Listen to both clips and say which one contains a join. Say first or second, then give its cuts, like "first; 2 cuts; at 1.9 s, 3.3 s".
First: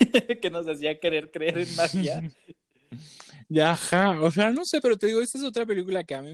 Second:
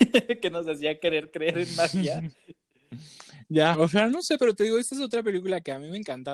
second; 1 cut; at 3.7 s